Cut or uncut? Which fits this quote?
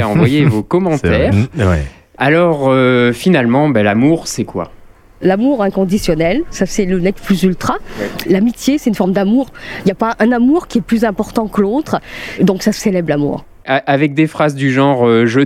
cut